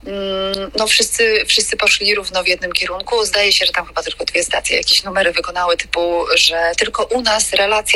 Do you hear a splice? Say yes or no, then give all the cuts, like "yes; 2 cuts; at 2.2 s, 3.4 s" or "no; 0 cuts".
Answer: no; 0 cuts